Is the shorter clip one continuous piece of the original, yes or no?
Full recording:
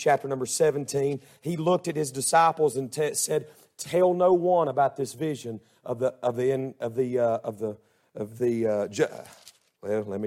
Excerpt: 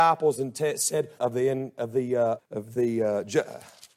no